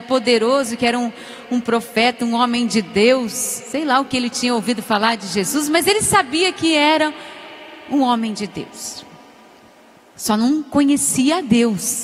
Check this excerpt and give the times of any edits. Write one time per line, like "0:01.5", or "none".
none

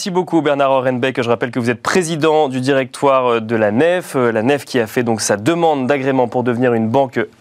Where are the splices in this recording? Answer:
none

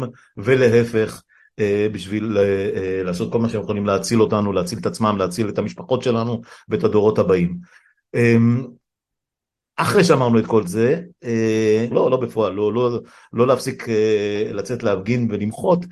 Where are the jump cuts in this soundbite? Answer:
0:11.9

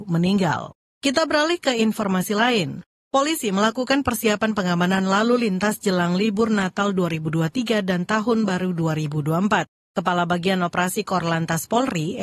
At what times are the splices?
none

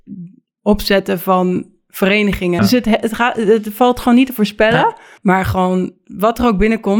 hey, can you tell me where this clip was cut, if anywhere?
0:02.6
0:05.2

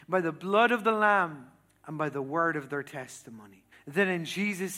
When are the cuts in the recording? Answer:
0:03.7

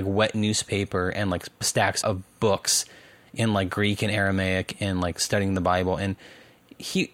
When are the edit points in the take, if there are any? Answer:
0:02.0

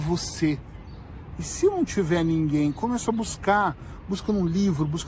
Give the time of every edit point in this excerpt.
0:01.3

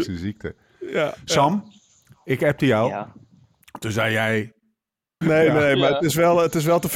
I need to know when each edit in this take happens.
0:05.2

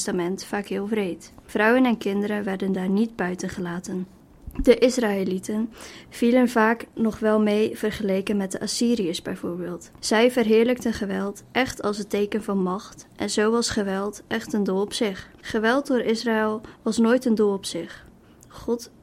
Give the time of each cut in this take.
0:15.4

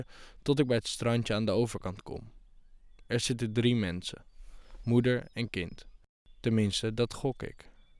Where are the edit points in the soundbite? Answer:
0:04.8

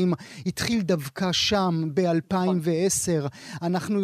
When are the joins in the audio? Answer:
none

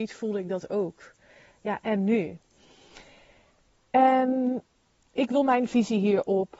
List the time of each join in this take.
none

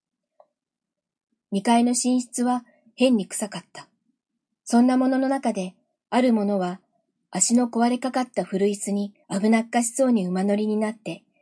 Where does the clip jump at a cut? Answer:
0:04.5
0:06.0
0:09.2

